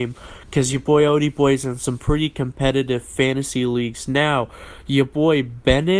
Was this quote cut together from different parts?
no; 0 cuts

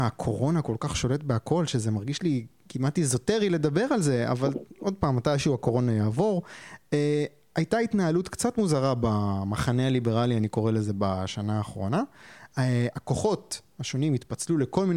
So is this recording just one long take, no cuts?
yes; 0 cuts

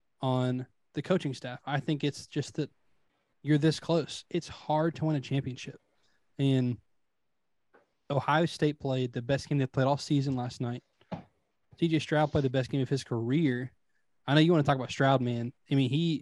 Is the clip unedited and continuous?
yes; 0 cuts

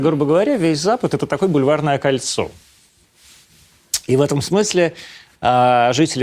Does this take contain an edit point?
no; 0 cuts

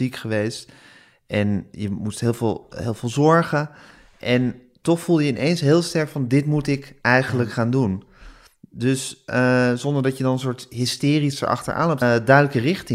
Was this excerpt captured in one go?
no; 1 cut; at 12.0 s

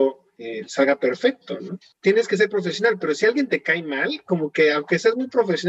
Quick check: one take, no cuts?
yes; 0 cuts

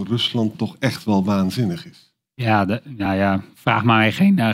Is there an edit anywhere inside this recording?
no; 0 cuts

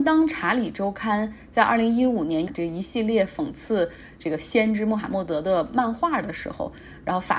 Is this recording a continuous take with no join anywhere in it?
no; 1 cut; at 2.5 s

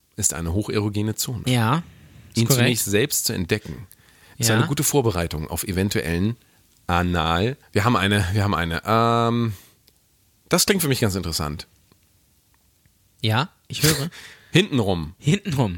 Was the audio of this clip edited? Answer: yes; 1 cut; at 7.6 s

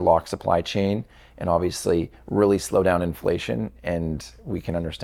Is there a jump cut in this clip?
no; 0 cuts

